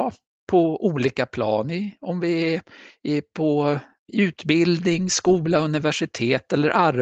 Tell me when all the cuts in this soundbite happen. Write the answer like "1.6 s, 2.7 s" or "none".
none